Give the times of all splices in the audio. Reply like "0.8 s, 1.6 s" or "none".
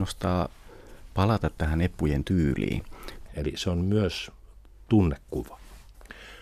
3.3 s

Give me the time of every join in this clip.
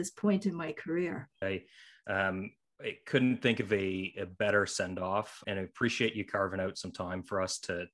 1.4 s, 5.4 s

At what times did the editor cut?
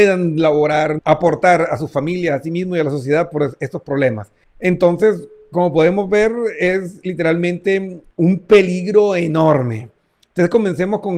1.0 s, 4.4 s, 8.1 s

